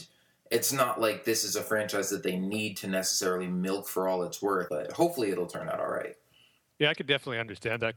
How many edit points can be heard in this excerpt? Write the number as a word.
one